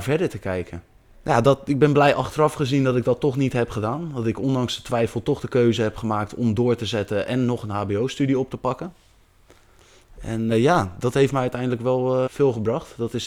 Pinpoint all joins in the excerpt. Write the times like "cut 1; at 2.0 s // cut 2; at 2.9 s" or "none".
cut 1; at 10.5 s // cut 2; at 12.3 s